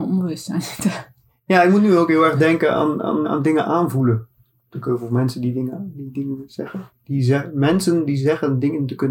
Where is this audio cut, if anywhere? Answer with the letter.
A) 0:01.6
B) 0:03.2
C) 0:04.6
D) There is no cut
B